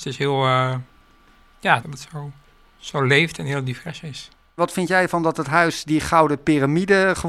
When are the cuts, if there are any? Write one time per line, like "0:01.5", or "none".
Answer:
0:01.8